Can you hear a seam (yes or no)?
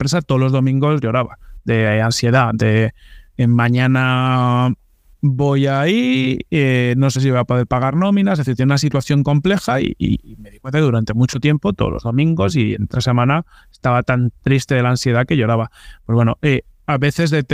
no